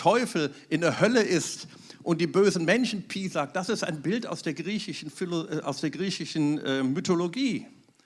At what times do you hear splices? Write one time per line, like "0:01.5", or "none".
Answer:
none